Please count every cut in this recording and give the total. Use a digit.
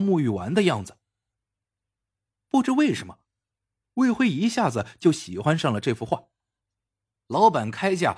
1